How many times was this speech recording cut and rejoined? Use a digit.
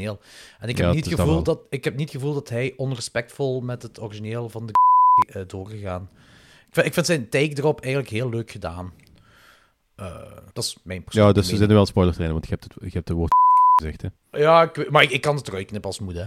1